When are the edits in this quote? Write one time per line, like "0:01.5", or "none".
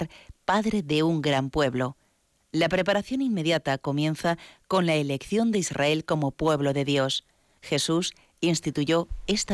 0:07.6